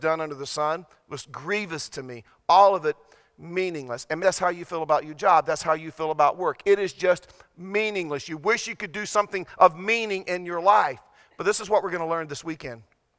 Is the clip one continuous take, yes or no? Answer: no